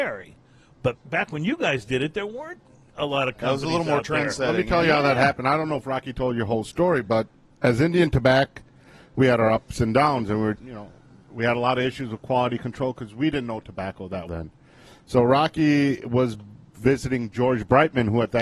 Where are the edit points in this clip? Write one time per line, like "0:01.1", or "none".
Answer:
0:00.9
0:10.6
0:14.3

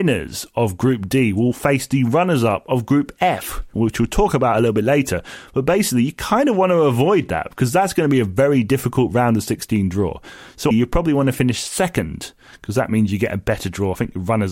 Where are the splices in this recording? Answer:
0:03.7
0:10.7

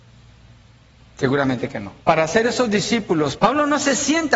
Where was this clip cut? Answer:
0:02.0
0:03.4

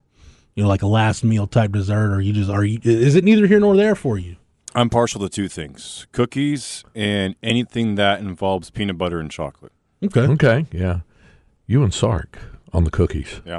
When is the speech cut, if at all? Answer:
none

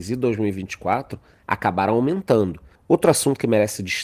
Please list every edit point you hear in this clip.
0:02.7

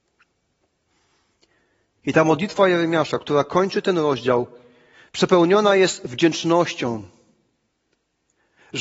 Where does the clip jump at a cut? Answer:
none

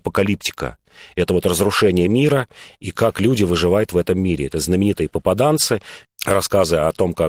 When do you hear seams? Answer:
0:06.0

